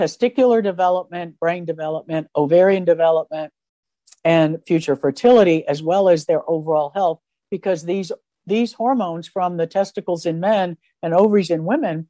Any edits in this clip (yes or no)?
no